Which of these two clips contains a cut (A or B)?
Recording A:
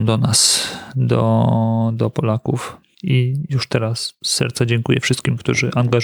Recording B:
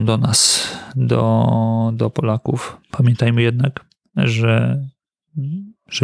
B